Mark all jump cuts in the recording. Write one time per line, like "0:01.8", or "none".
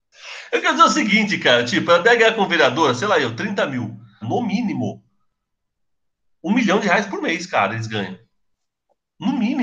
0:04.2